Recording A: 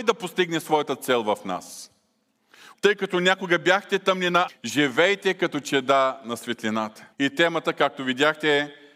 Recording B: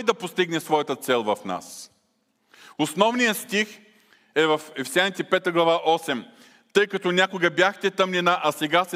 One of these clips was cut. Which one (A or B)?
A